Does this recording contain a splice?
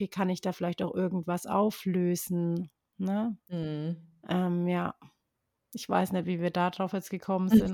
no; 0 cuts

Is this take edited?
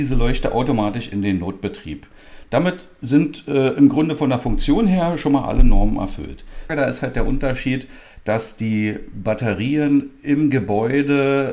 yes; 1 cut; at 6.7 s

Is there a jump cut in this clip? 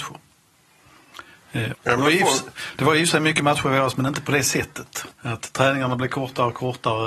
yes; 2 cuts; at 1.7 s, 5.1 s

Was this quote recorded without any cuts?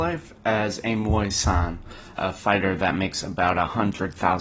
no; 1 cut; at 2.2 s

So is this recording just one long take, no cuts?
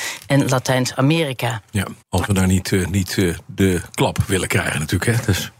no; 1 cut; at 2.0 s

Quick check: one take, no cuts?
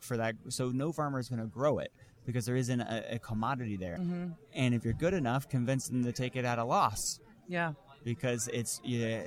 no; 1 cut; at 4.0 s

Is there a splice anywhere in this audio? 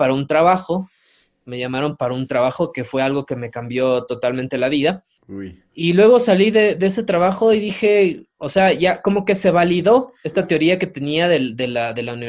no; 0 cuts

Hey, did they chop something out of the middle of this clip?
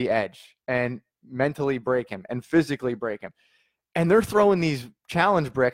no; 0 cuts

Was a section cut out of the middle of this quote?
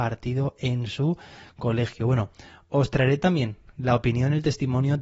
no; 0 cuts

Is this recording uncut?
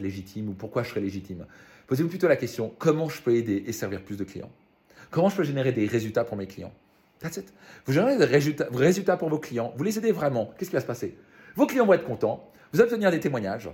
yes; 0 cuts

